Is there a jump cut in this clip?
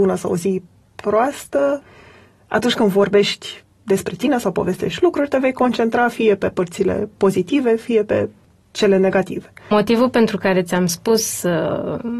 yes; 1 cut; at 9.7 s

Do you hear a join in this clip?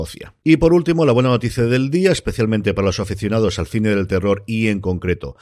no; 0 cuts

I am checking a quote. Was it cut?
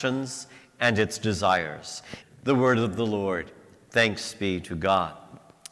yes; 1 cut; at 2.2 s

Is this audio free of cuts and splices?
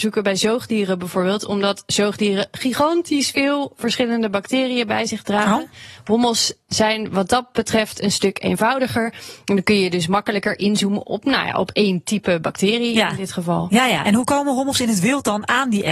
yes; 0 cuts

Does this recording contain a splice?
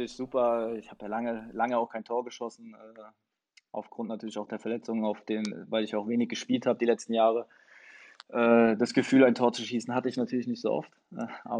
no; 0 cuts

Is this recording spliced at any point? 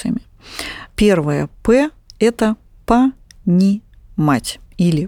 no; 0 cuts

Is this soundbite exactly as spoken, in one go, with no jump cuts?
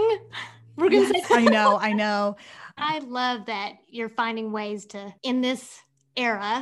no; 2 cuts; at 1.2 s, 2.8 s

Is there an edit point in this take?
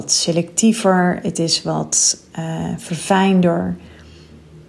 no; 0 cuts

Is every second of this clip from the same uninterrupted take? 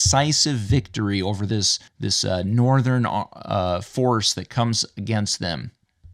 no; 1 cut; at 1.9 s

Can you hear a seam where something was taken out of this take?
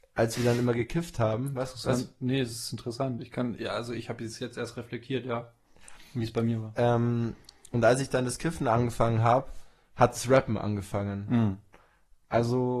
no; 0 cuts

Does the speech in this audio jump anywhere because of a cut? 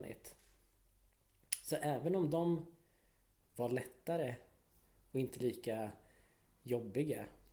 yes; 1 cut; at 3.4 s

